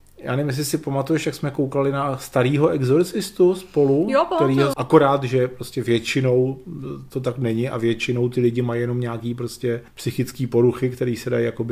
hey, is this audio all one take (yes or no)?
no